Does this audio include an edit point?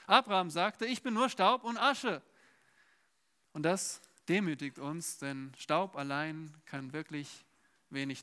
no; 0 cuts

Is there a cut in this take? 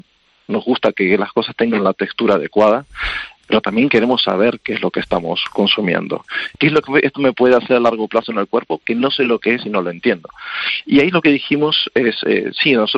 yes; 1 cut; at 6.5 s

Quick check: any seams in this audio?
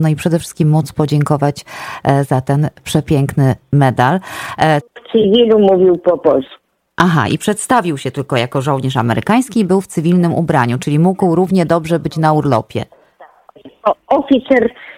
yes; 1 cut; at 4.8 s

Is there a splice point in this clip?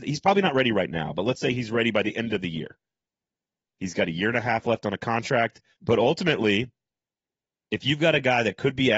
yes; 2 cuts; at 3.7 s, 5.8 s

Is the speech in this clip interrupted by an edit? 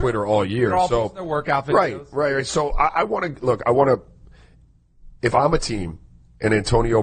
no; 0 cuts

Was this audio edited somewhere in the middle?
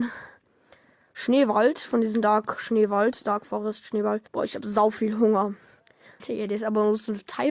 yes; 2 cuts; at 4.3 s, 6.2 s

